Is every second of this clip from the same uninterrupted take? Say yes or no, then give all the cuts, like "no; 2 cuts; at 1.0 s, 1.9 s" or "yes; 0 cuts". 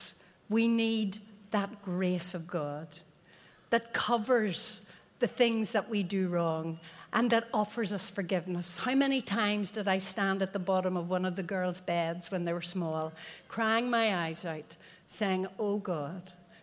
yes; 0 cuts